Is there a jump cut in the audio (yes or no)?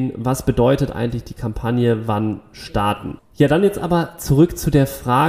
yes